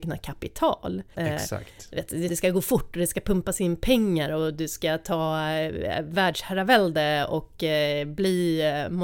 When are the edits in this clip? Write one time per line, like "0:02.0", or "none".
0:01.1
0:02.3